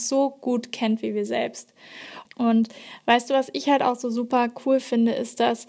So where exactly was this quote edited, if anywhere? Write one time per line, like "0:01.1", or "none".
0:02.2